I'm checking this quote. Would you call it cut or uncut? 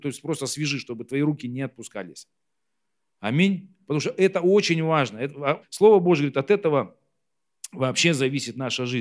cut